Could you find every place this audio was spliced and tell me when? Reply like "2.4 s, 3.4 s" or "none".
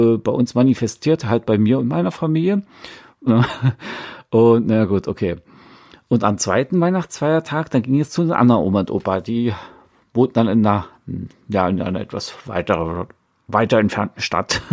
3.3 s